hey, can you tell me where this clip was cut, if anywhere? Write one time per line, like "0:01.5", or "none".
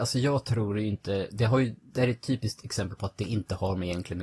none